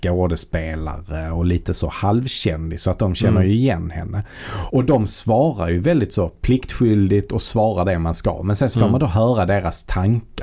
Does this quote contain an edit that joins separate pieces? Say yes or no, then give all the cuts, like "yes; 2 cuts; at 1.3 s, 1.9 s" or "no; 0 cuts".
yes; 1 cut; at 4.7 s